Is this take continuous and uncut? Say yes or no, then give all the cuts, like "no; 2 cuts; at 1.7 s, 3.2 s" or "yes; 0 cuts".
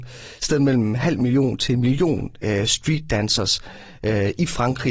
yes; 0 cuts